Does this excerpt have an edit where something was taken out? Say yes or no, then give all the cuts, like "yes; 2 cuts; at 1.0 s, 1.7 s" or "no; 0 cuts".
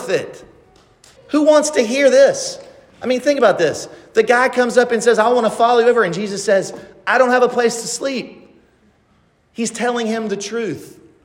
yes; 1 cut; at 1.2 s